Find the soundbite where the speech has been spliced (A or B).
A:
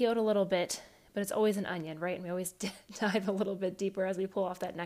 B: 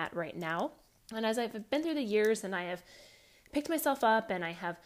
B